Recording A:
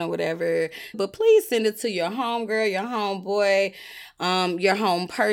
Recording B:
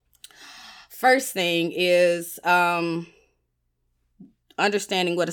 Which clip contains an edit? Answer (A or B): A